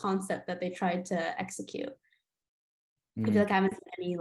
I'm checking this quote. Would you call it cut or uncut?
uncut